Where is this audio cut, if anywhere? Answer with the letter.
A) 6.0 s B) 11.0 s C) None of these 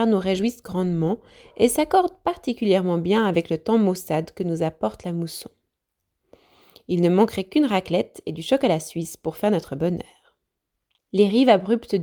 B